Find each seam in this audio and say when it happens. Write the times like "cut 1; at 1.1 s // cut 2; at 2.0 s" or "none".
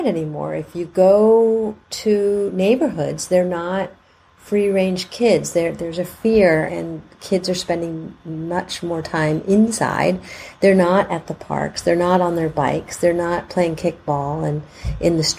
cut 1; at 6.7 s